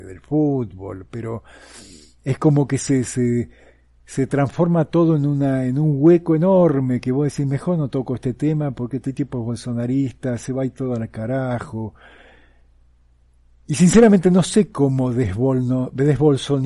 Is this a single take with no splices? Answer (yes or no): yes